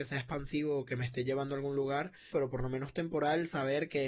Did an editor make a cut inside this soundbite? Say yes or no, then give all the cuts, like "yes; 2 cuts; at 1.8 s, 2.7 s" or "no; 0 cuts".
yes; 1 cut; at 2.3 s